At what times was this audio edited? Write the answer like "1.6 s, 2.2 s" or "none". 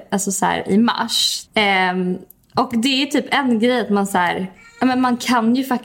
1.4 s